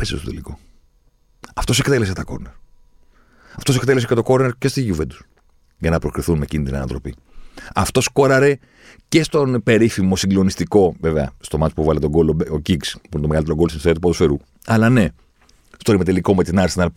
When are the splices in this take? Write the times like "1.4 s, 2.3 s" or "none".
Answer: none